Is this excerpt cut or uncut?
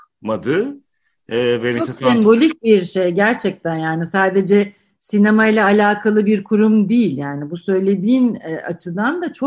uncut